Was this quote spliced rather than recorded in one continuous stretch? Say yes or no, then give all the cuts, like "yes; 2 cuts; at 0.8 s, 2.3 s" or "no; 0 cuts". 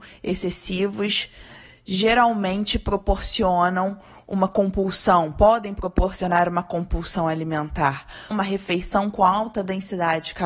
yes; 1 cut; at 8.3 s